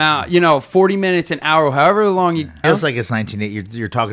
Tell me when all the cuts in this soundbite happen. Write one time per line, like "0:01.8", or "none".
0:02.6